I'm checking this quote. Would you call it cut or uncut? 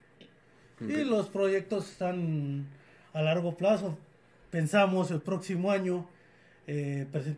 uncut